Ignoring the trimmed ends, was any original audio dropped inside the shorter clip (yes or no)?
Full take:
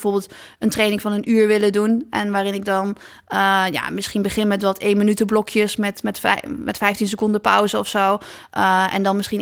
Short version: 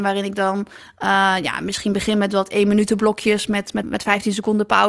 yes